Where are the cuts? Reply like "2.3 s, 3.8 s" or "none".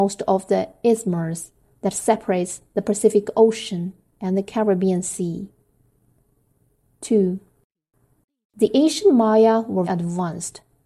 9.8 s